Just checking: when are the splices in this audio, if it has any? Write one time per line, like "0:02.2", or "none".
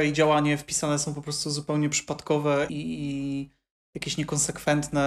0:02.7